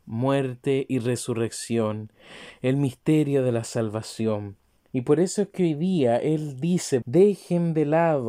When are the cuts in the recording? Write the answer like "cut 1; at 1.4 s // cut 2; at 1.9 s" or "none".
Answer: cut 1; at 4.8 s // cut 2; at 7.0 s